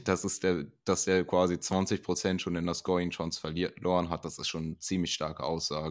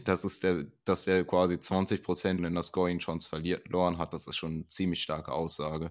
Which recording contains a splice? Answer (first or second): second